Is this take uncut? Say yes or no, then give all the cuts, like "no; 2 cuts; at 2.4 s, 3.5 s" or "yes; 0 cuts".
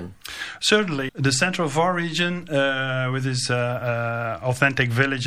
no; 1 cut; at 1.1 s